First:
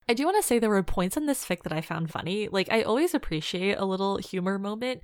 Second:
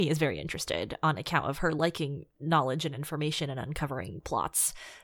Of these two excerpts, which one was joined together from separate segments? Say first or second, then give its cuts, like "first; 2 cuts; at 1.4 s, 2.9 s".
first; 1 cut; at 2.1 s